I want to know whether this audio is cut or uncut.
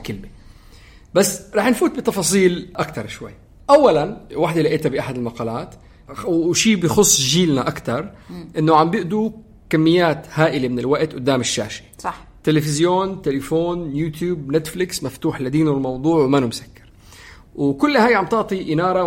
uncut